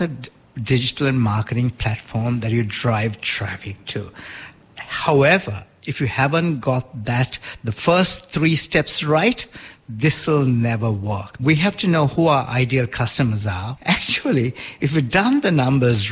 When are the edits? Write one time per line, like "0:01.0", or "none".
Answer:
0:11.4
0:13.8